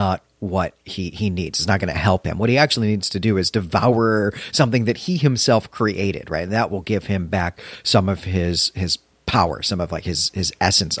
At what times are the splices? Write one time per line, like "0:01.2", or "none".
none